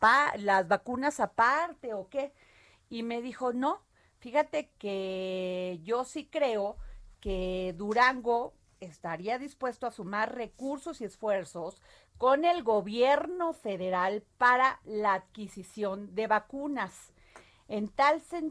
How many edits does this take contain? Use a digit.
2